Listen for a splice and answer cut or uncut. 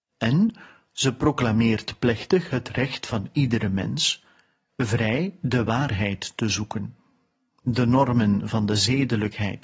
uncut